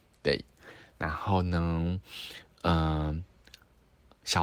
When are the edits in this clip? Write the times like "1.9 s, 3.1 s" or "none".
none